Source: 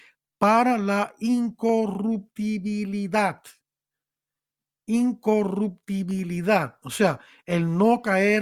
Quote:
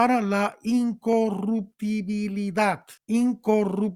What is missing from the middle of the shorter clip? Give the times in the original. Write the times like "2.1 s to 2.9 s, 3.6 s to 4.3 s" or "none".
3.5 s to 4.8 s